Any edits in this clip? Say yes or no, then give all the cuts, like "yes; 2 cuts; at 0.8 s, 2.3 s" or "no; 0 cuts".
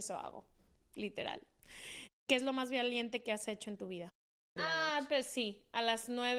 yes; 1 cut; at 4.6 s